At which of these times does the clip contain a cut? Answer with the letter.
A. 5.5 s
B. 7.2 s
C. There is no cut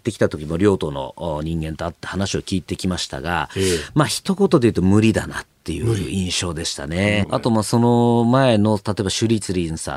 B